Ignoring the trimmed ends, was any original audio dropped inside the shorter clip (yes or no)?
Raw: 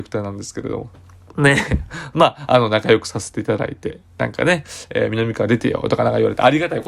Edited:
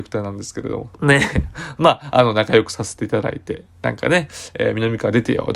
yes